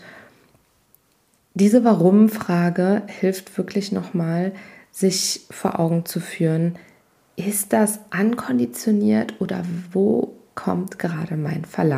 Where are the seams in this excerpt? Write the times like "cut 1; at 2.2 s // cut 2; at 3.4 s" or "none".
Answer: none